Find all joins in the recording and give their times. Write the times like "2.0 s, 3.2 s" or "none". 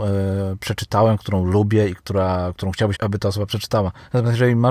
2.9 s